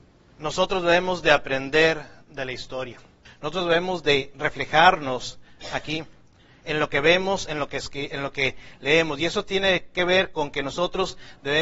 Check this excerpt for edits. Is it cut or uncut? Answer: cut